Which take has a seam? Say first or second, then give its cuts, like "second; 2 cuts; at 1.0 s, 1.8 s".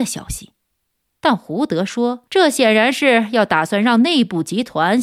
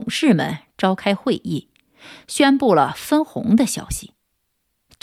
first; 2 cuts; at 1.1 s, 2.3 s